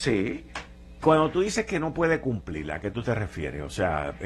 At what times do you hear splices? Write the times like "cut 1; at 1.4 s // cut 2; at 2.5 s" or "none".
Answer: cut 1; at 1.0 s